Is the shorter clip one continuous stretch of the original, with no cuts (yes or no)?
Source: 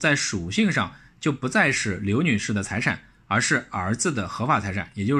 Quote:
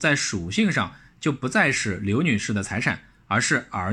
yes